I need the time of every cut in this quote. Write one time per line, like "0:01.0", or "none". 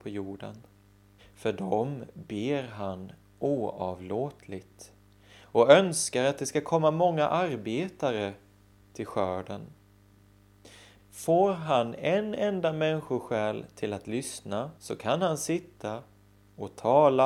0:01.2
0:11.0
0:14.8